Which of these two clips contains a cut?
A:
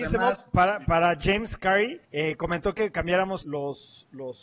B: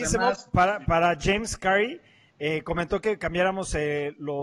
A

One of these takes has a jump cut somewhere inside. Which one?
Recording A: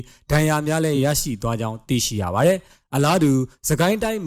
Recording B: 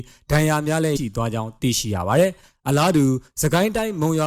B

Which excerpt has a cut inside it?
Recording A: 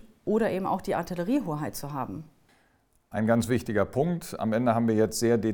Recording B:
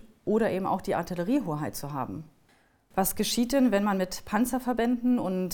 B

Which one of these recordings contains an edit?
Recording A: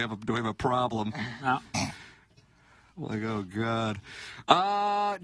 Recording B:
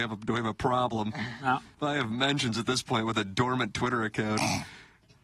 A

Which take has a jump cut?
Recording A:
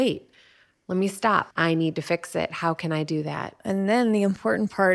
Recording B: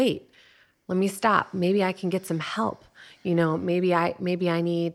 A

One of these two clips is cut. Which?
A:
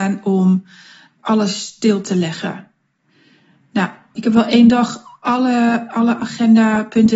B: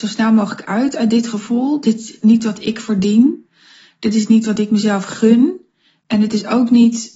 A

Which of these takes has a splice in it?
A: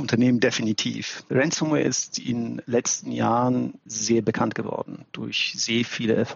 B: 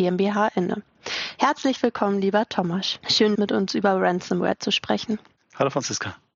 B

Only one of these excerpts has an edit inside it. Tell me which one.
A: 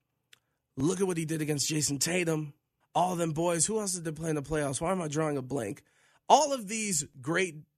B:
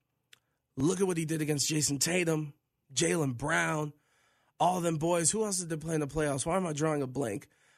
A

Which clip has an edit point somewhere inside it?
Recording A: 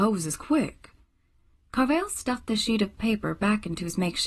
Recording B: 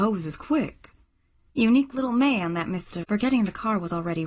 B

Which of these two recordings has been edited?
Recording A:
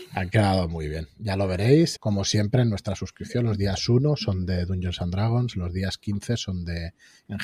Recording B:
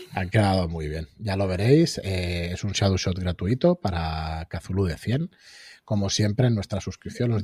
A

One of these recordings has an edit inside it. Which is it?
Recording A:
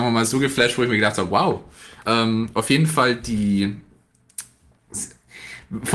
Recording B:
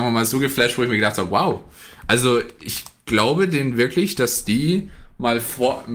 A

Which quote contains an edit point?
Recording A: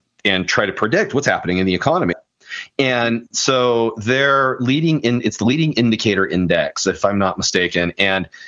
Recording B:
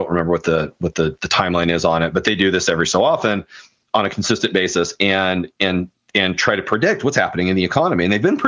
A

